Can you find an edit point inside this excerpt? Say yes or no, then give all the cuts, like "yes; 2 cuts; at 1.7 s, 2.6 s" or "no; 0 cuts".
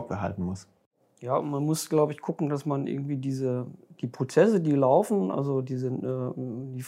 no; 0 cuts